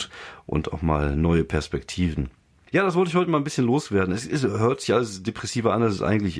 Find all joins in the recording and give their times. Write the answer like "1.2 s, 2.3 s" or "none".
2.7 s